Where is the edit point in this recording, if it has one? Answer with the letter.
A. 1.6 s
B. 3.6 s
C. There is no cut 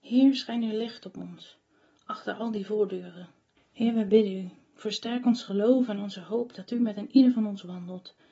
B